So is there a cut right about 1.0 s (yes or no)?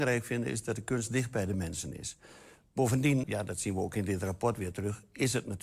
no